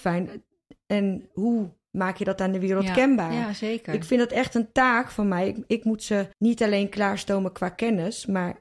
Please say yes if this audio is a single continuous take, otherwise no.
no